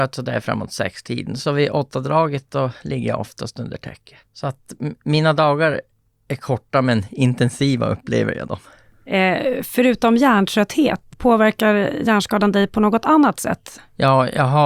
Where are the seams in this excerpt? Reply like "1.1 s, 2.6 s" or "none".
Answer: 11.1 s